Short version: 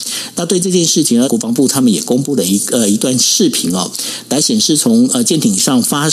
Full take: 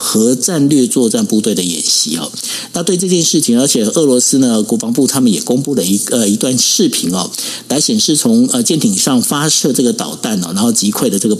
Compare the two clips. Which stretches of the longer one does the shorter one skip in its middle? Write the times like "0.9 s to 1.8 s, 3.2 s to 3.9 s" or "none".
3.6 s to 4.6 s